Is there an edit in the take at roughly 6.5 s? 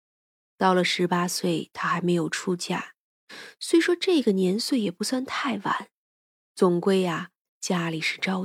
no; 0 cuts

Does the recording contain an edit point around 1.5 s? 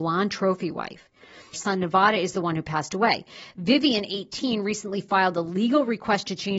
yes; 1 cut; at 1.5 s

